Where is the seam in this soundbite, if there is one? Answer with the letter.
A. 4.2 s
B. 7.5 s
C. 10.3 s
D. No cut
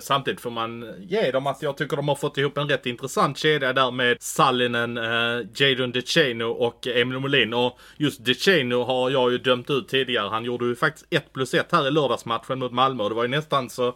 A